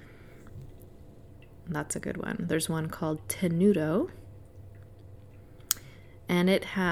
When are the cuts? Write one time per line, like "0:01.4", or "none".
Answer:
none